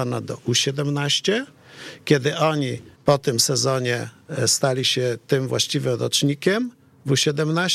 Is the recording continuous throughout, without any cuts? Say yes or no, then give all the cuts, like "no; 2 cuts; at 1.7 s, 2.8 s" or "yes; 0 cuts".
no; 1 cut; at 2.9 s